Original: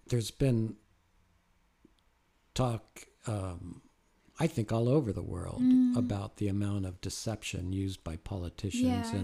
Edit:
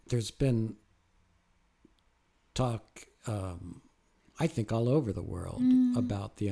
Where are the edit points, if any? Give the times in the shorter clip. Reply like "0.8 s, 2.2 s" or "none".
none

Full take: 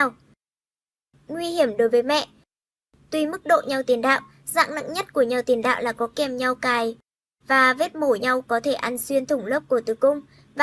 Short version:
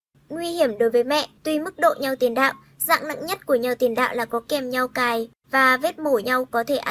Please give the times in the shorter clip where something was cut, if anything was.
1.4 s, 5.4 s

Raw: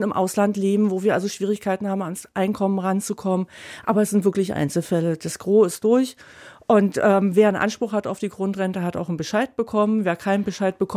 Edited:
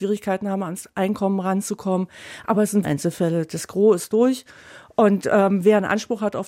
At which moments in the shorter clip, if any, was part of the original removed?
2.8 s

